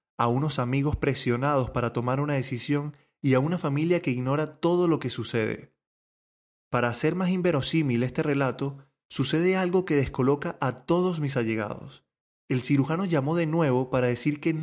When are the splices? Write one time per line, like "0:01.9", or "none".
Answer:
none